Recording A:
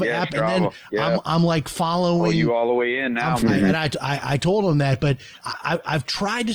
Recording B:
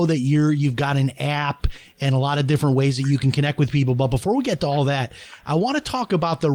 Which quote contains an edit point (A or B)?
A